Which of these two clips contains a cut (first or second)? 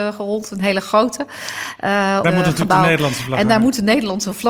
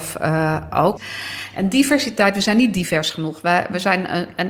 first